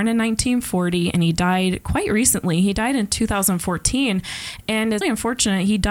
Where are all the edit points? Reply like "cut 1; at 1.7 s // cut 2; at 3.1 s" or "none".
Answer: cut 1; at 5.0 s